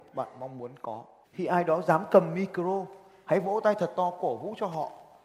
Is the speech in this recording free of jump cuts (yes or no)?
no